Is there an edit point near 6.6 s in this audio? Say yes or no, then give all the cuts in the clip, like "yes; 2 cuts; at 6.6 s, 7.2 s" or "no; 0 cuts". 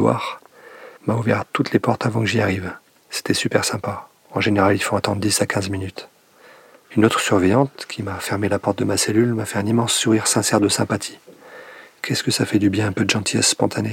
no; 1 cut; at 1.0 s